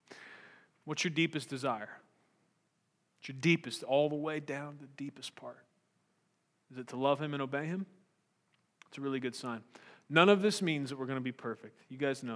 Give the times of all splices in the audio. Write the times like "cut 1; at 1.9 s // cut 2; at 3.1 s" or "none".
none